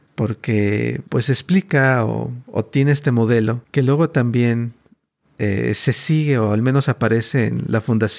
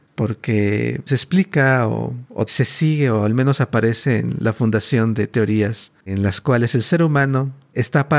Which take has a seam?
second; 2 cuts; at 1.1 s, 2.5 s

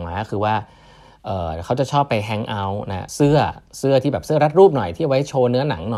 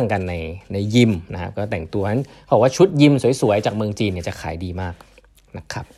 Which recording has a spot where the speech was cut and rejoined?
first; 1 cut; at 3.1 s

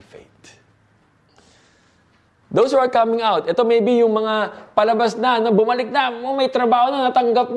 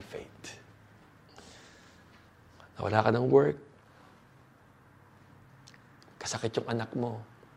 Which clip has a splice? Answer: first; 1 cut; at 2.4 s

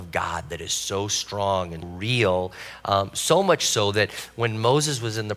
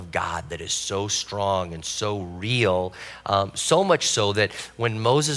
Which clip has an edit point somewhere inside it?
first; 1 cut; at 1.8 s

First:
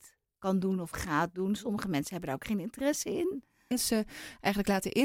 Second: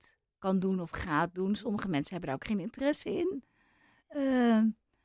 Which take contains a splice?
first; 1 cut; at 3.7 s

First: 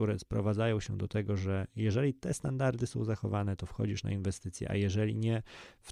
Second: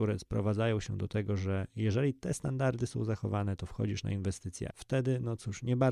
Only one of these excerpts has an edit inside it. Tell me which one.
second; 1 cut; at 4.7 s

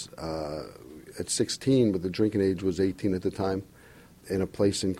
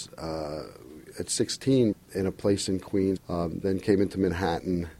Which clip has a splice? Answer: second; 2 cuts; at 1.9 s, 3.2 s

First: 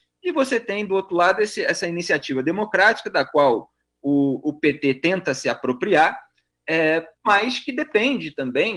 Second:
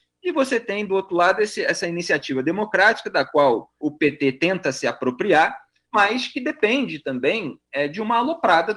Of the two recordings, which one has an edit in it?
second; 2 cuts; at 3.8 s, 5.9 s

